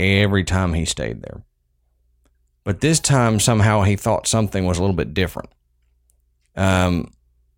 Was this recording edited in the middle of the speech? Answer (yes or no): no